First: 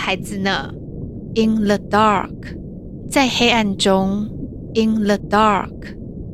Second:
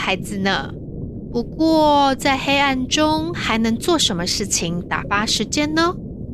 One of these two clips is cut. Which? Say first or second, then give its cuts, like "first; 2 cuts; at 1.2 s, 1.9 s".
first; 2 cuts; at 1.3 s, 4.7 s